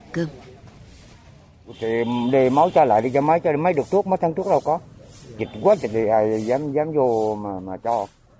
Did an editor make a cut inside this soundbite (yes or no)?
no